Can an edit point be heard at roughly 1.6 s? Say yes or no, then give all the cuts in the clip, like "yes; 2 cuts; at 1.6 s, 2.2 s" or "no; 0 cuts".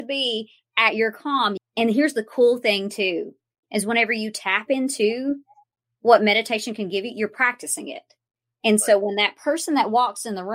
yes; 1 cut; at 1.6 s